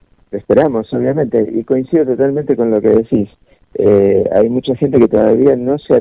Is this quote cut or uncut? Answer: uncut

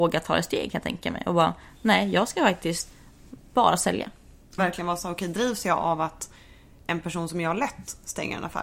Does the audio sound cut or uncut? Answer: cut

